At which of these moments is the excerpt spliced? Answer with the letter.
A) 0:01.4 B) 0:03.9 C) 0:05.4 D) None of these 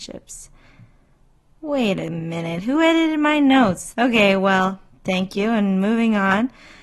B